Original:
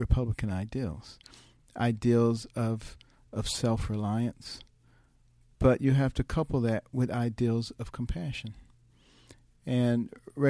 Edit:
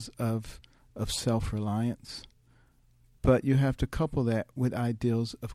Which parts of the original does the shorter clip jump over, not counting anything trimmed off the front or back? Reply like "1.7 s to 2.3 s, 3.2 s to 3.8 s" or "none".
none